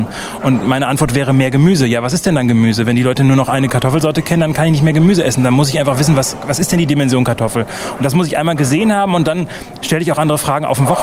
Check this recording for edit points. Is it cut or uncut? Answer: uncut